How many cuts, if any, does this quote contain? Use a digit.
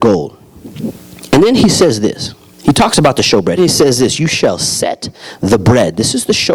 1